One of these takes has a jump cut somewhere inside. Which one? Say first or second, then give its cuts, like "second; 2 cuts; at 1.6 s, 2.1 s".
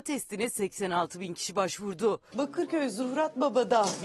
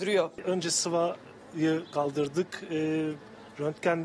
first; 1 cut; at 2.3 s